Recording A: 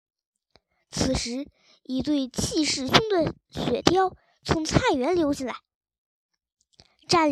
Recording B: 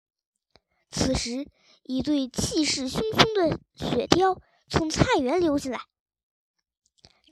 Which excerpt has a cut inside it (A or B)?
A